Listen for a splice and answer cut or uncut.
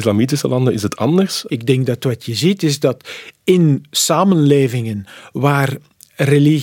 cut